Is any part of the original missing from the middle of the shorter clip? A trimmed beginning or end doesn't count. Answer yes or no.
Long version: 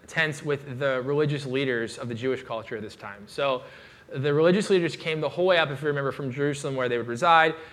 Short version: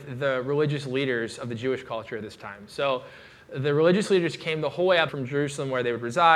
yes